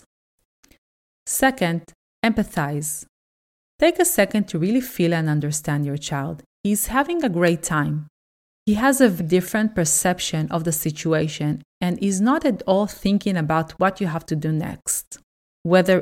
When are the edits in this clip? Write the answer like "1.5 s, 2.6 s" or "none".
9.2 s